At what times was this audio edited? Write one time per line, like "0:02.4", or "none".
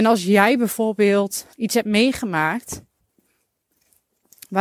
0:01.5